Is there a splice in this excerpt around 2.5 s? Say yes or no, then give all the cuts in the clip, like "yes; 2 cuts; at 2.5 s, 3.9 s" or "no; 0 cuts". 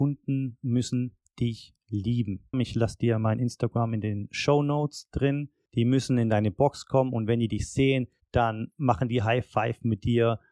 yes; 3 cuts; at 2.5 s, 5.7 s, 8.2 s